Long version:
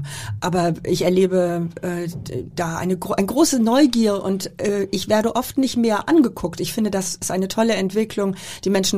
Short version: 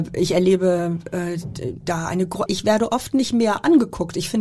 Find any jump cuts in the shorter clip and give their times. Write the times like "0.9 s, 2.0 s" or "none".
2.5 s